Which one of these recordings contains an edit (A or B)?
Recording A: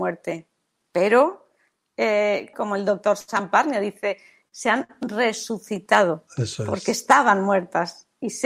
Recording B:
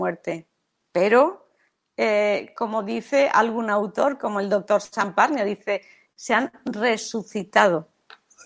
A